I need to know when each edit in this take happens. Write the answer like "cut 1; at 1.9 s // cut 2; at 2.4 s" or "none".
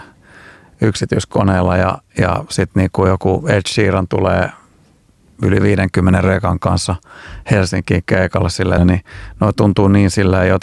cut 1; at 8.8 s

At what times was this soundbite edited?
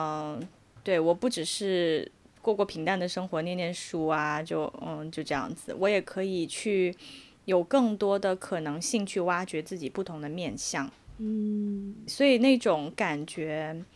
cut 1; at 12.1 s

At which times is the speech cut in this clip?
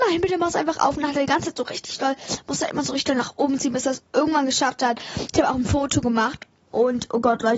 cut 1; at 6.7 s

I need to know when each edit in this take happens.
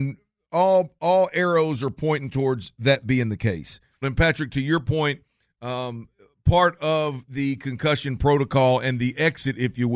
cut 1; at 4.0 s

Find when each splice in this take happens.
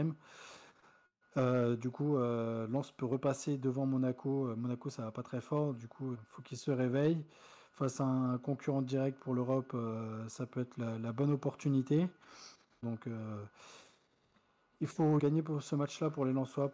cut 1; at 6.1 s // cut 2; at 12.8 s // cut 3; at 15.2 s

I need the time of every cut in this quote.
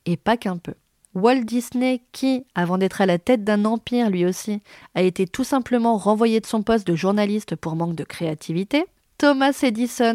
cut 1; at 1.1 s

